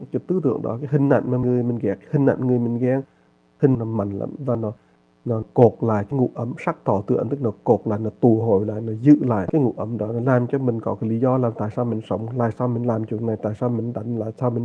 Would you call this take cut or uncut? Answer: cut